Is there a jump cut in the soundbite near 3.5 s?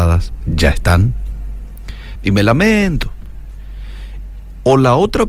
no; 1 cut; at 2.2 s

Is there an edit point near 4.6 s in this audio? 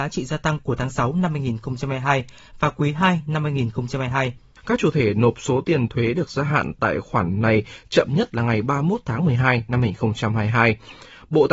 yes; 1 cut; at 4.6 s

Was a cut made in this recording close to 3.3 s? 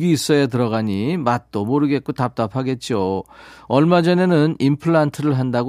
no; 0 cuts

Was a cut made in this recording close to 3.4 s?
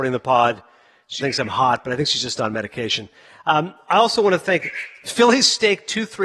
no; 1 cut; at 1.2 s

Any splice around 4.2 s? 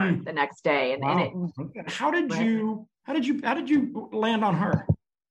no; 2 cuts; at 1.9 s, 2.9 s

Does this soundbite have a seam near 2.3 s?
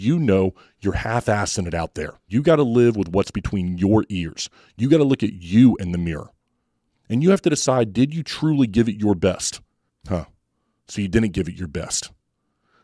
yes; 2 cuts; at 2.3 s, 9.9 s

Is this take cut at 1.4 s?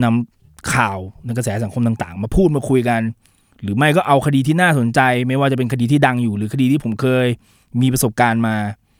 no; 0 cuts

